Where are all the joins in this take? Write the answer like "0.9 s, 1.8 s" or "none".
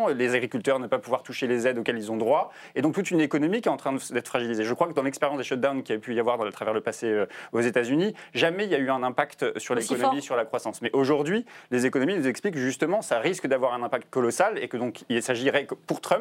none